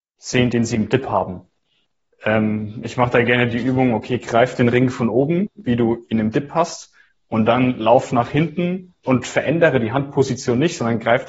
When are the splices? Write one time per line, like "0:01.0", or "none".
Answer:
0:09.0